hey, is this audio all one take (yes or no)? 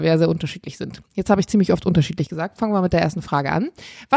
yes